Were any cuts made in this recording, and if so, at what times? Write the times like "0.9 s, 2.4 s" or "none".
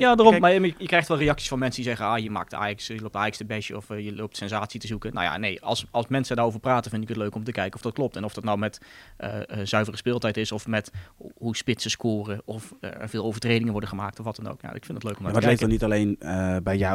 none